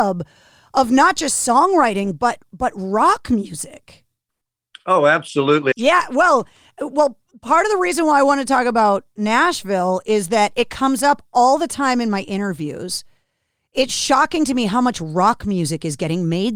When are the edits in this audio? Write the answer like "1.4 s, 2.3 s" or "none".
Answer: 5.7 s